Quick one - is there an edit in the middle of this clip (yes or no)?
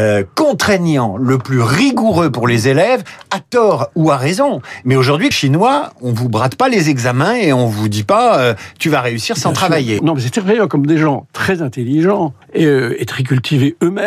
yes